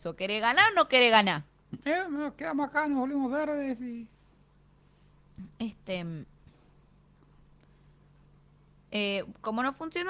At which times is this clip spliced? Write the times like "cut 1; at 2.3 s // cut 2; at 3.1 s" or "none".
none